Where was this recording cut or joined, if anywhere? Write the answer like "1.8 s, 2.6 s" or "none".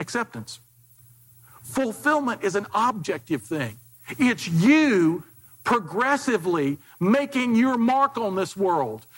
none